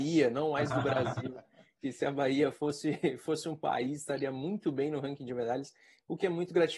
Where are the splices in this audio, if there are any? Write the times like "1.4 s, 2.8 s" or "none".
none